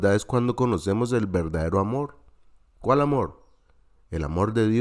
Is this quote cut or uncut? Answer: uncut